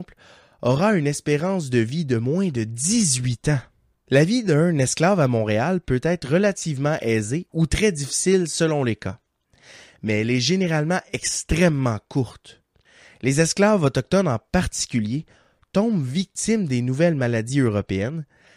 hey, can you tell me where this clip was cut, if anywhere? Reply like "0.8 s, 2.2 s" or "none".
4.0 s